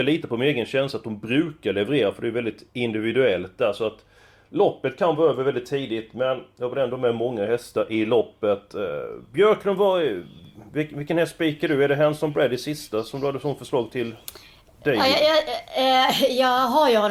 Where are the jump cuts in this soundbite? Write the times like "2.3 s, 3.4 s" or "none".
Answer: none